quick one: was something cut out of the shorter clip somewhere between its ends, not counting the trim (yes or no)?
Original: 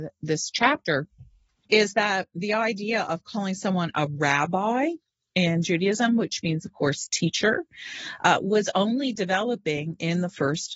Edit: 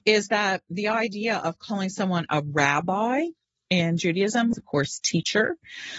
yes